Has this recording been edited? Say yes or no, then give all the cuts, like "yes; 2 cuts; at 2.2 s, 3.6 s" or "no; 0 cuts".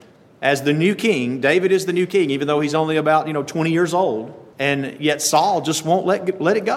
no; 0 cuts